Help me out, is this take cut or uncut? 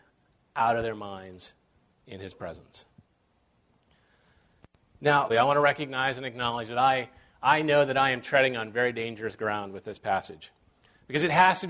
cut